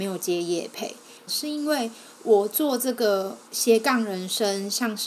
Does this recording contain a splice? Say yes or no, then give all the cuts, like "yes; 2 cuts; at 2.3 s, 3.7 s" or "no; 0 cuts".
yes; 2 cuts; at 1.3 s, 3.4 s